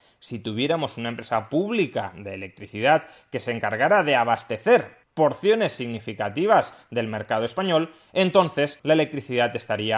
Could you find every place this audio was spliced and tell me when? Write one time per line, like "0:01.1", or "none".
0:08.8